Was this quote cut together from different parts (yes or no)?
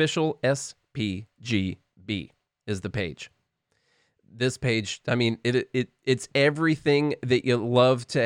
no